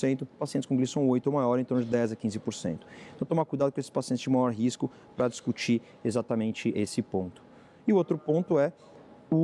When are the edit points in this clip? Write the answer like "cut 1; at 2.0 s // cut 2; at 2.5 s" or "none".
cut 1; at 6.7 s